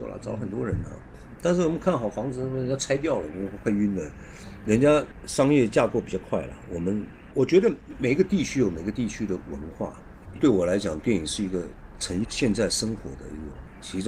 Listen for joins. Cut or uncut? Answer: cut